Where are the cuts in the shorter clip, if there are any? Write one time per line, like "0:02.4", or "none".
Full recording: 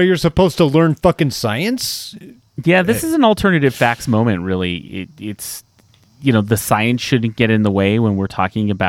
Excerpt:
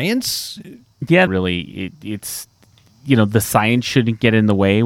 0:01.3